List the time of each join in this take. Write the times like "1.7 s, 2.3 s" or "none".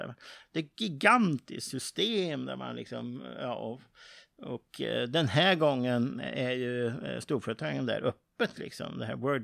none